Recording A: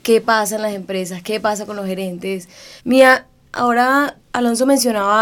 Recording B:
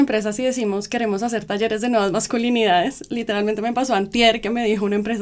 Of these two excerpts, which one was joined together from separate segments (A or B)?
A